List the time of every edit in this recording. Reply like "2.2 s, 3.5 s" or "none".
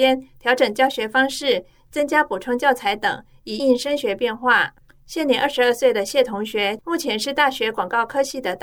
3.6 s, 6.8 s